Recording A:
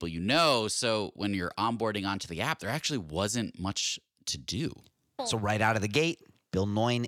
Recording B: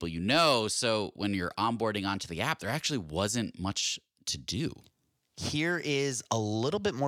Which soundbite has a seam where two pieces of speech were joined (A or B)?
A